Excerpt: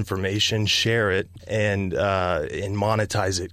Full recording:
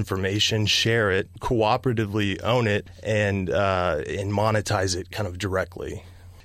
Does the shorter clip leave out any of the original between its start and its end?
yes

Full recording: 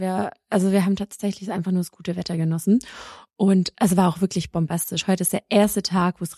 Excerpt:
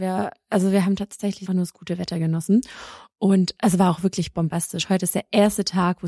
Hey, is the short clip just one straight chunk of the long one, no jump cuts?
no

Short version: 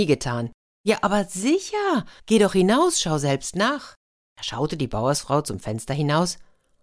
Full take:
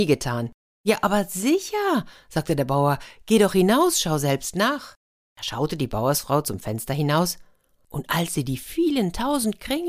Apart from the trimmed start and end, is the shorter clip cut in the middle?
yes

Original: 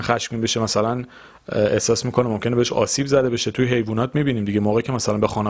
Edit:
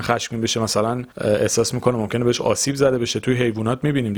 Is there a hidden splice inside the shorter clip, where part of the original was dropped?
yes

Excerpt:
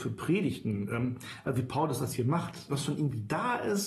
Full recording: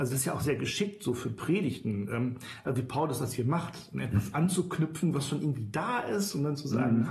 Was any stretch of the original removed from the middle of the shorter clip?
yes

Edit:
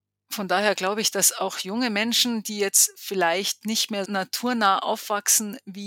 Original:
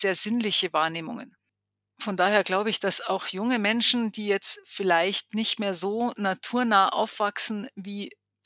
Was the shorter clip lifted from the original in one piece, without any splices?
no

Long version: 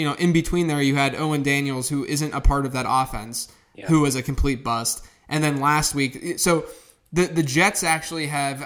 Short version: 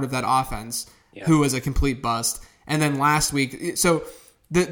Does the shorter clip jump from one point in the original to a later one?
no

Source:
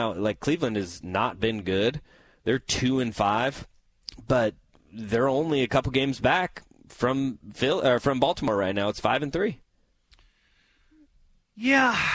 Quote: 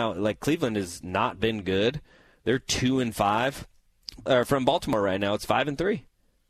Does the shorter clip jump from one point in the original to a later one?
yes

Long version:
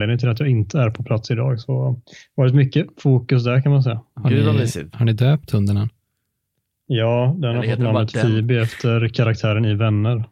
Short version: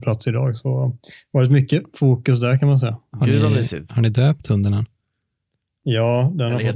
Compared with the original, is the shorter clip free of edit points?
yes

